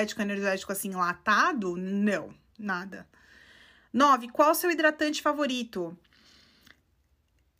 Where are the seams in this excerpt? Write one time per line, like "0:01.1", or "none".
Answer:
none